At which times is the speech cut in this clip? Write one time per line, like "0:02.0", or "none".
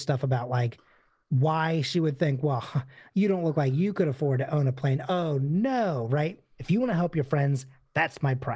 0:05.1
0:06.6